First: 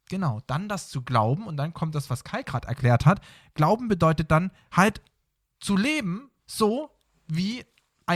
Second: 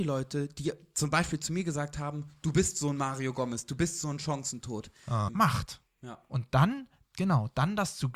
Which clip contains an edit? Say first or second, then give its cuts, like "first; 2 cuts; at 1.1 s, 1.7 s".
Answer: second; 1 cut; at 5.3 s